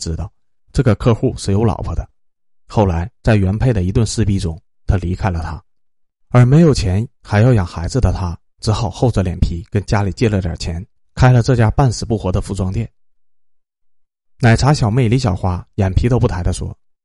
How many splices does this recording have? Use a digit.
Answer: 0